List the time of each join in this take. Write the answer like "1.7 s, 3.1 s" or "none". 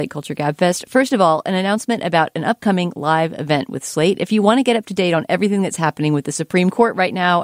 none